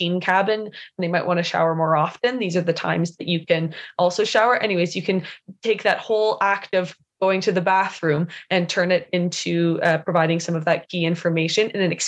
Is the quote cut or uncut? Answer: uncut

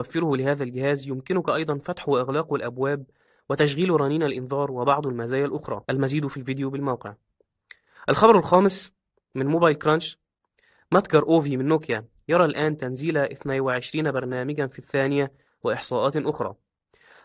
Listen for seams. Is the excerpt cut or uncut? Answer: cut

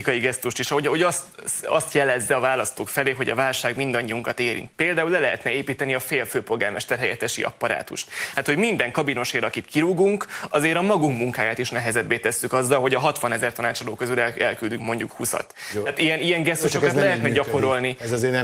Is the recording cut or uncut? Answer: uncut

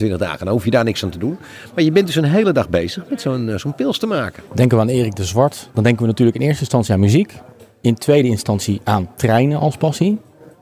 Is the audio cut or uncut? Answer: uncut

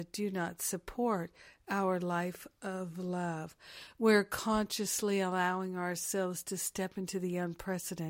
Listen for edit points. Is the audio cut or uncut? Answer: uncut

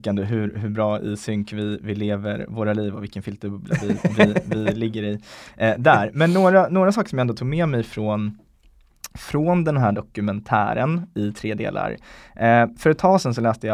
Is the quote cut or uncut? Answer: uncut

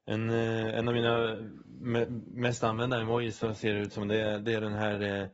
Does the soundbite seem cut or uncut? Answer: uncut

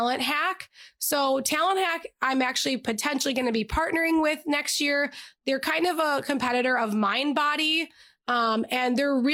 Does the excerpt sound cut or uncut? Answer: uncut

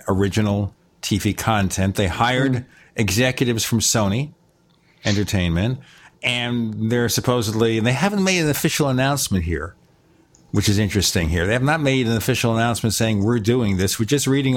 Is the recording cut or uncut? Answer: uncut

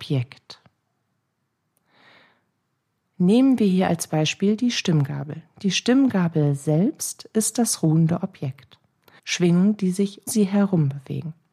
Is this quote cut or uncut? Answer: cut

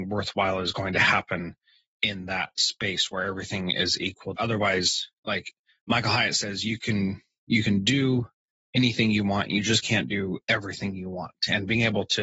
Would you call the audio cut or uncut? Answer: cut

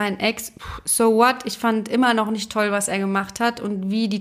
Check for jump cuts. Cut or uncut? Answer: uncut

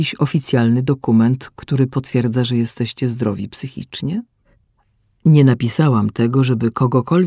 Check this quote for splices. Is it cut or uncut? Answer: uncut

